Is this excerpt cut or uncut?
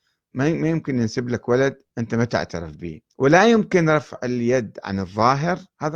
cut